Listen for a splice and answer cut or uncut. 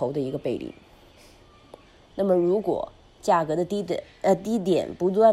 cut